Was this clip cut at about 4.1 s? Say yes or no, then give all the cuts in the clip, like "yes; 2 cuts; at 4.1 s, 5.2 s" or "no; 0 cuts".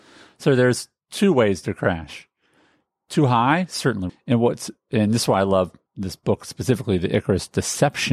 yes; 1 cut; at 4.1 s